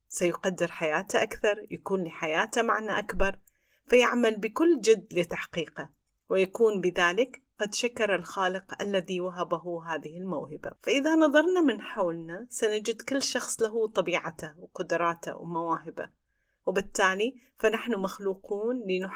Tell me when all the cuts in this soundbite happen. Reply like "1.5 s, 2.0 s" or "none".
10.8 s